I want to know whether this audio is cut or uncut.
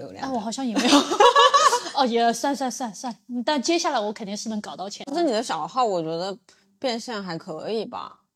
uncut